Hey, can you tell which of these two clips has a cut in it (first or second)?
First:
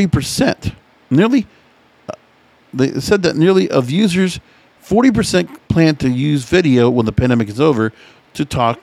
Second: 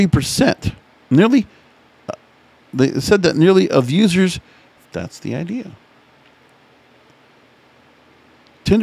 second